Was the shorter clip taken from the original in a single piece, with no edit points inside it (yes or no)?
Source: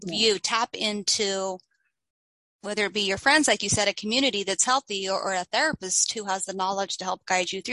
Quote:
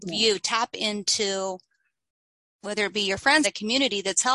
no